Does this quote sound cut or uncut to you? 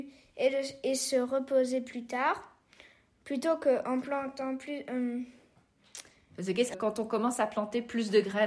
cut